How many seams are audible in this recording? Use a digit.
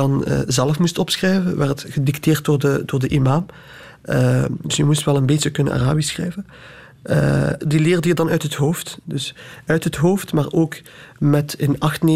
2